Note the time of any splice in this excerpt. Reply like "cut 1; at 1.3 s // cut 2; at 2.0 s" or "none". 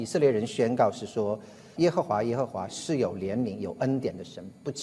cut 1; at 1.8 s